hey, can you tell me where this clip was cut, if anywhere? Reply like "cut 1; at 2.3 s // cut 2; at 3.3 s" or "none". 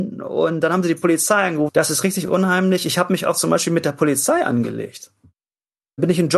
cut 1; at 1.7 s